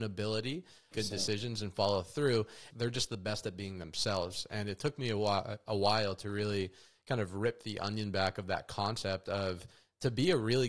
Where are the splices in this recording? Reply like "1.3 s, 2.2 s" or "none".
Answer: 0.9 s, 2.7 s